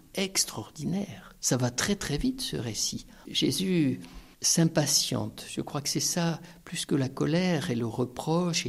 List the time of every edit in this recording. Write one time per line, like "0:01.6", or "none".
0:03.3